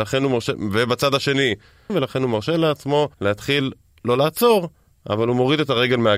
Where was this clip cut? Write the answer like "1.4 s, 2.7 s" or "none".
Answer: 1.9 s, 3.1 s